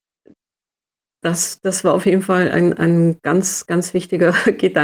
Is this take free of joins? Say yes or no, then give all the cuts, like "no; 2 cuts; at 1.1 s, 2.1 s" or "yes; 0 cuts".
no; 1 cut; at 3.7 s